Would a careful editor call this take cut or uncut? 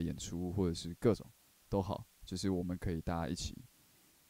uncut